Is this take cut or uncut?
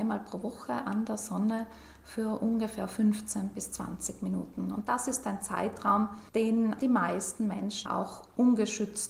cut